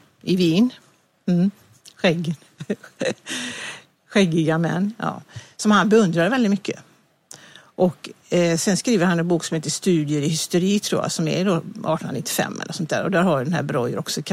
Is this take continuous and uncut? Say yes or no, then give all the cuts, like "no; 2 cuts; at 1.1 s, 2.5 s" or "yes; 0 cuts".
yes; 0 cuts